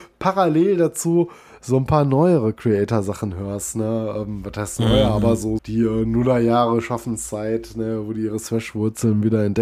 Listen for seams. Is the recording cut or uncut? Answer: cut